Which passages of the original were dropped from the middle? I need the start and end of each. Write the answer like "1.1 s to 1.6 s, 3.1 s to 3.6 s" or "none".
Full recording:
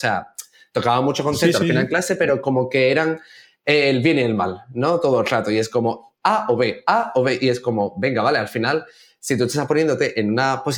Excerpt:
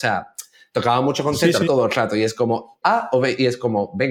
1.7 s to 5.0 s, 6.2 s to 6.8 s